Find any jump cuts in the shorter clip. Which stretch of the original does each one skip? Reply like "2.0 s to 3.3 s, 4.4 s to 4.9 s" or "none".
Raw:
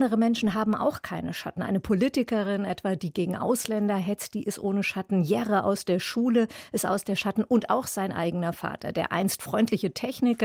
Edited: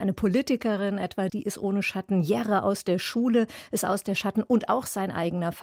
3.0 s to 4.3 s